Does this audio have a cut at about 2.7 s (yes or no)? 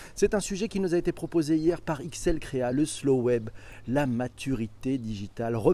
no